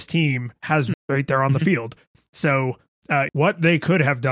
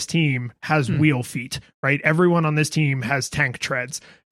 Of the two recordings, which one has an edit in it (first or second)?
first